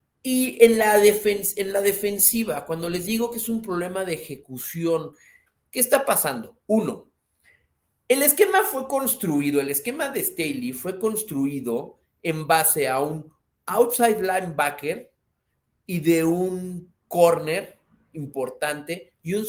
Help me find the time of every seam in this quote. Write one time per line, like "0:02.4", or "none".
none